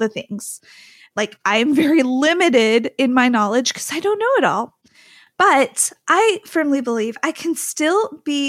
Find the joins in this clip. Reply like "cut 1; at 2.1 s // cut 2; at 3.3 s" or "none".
cut 1; at 1.1 s

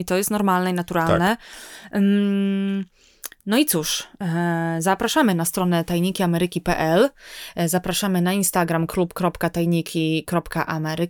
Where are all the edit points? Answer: none

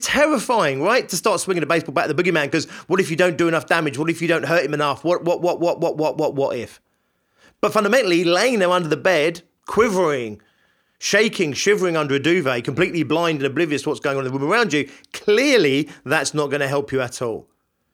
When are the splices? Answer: none

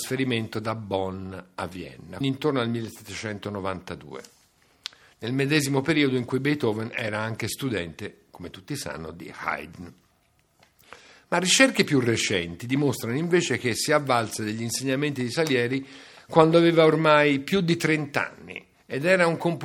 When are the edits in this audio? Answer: cut 1; at 2.2 s

